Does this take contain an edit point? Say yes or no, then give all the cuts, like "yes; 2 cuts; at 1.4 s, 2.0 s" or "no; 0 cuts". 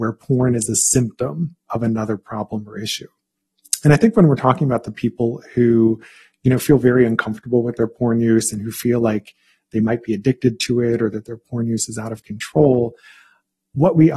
no; 0 cuts